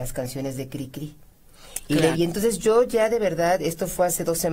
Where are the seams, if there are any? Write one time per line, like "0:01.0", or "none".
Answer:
0:02.1